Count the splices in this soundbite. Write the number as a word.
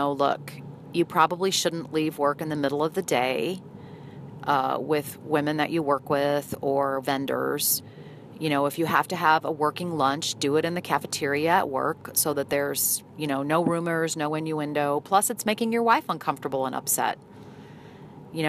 zero